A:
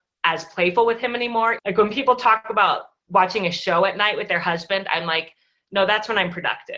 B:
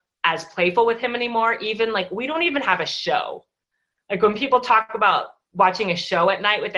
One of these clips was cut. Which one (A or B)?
A